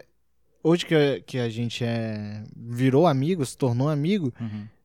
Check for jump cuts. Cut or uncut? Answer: uncut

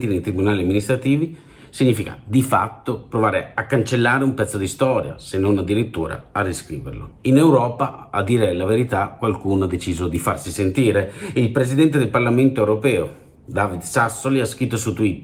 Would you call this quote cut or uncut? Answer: cut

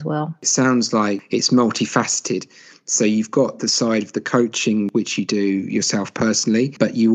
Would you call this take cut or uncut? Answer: uncut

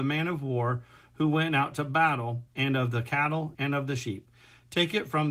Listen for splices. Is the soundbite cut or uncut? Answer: cut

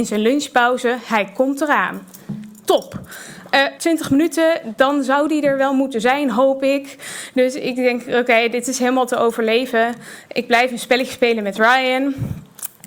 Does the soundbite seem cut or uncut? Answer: cut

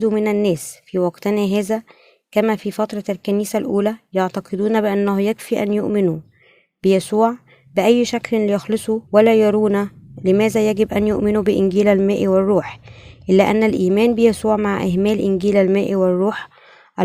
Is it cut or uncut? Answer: cut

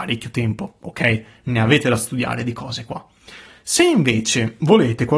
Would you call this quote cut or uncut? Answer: uncut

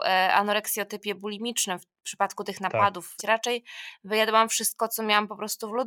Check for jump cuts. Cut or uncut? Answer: cut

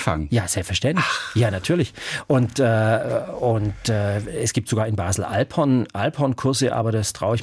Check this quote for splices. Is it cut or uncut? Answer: uncut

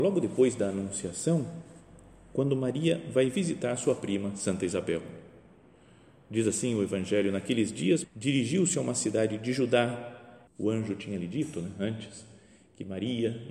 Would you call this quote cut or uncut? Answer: cut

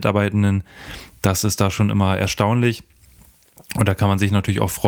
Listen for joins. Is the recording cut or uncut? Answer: uncut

